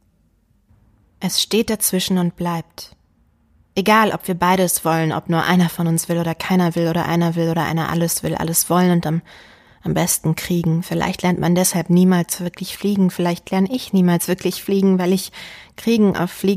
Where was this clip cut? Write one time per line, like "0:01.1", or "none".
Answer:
none